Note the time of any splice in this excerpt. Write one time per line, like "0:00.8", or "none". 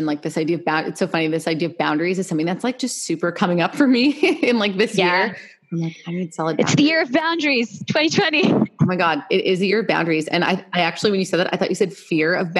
none